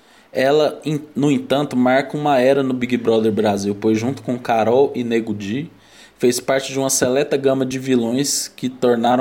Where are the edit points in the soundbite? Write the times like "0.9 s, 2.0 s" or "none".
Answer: none